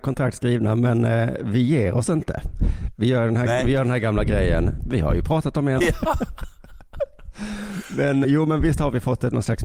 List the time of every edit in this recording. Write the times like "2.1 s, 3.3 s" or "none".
5.8 s, 8.2 s